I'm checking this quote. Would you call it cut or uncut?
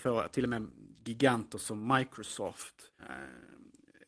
cut